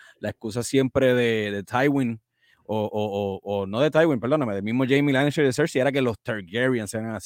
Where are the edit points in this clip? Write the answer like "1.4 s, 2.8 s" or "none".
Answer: none